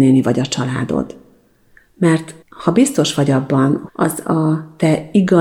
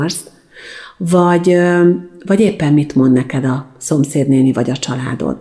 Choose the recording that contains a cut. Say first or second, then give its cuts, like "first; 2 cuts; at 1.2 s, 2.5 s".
first; 2 cuts; at 2.4 s, 3.9 s